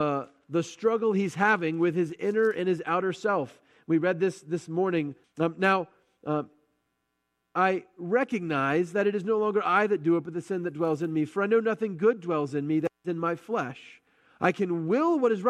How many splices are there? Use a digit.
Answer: 1